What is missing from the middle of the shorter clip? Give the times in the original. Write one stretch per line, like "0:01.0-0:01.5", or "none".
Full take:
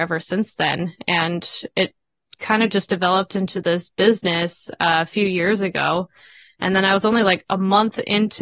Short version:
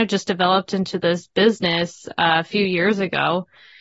none